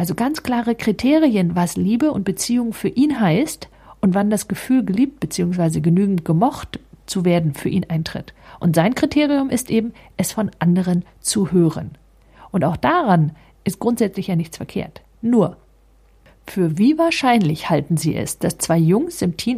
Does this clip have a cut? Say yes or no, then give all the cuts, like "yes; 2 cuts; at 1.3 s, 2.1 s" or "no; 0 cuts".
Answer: no; 0 cuts